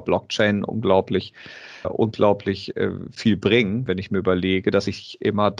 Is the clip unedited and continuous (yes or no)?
no